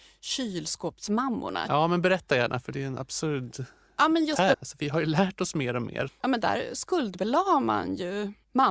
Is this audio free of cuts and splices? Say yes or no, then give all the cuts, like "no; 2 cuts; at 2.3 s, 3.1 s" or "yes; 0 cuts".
no; 3 cuts; at 1.7 s, 4.5 s, 6.1 s